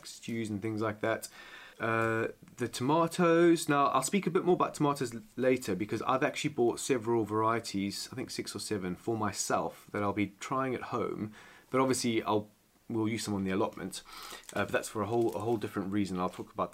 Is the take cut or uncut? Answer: cut